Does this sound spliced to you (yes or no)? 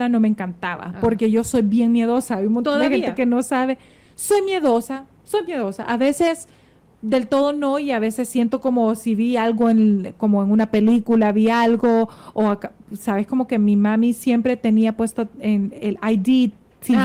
no